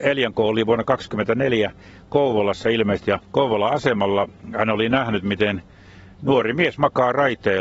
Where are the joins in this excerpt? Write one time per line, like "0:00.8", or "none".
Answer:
0:03.0

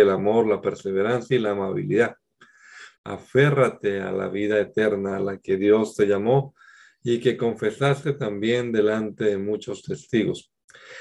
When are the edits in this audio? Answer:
0:03.0

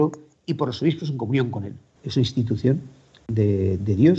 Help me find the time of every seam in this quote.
0:02.0

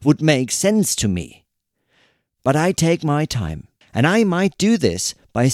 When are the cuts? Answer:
0:03.8

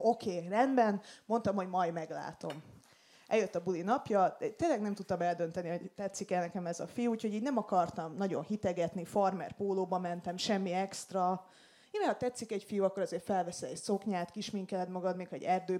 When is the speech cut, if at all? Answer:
0:04.6

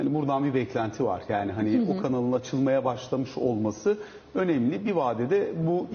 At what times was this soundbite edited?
none

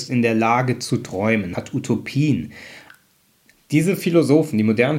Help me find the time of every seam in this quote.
0:01.6
0:03.5

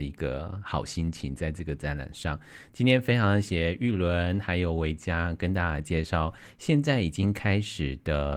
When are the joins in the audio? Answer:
0:03.4

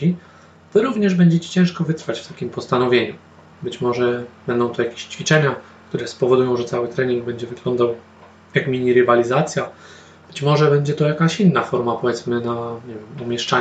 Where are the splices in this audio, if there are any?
0:03.5

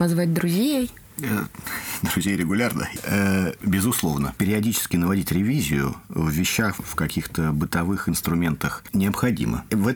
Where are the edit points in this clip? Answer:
0:06.8

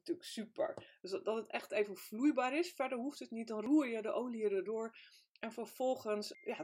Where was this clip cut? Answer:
0:01.0

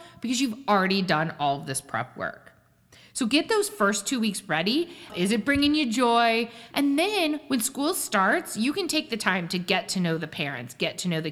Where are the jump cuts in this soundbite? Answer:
0:05.1
0:06.7

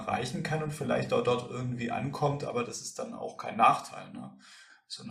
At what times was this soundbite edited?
none

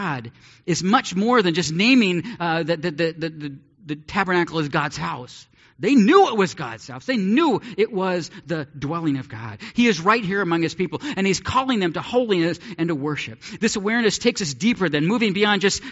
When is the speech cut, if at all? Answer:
none

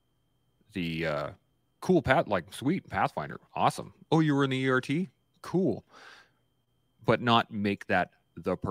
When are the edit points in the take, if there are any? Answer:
none

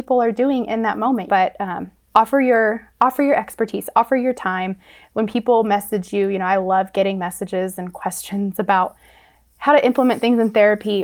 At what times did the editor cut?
0:01.3

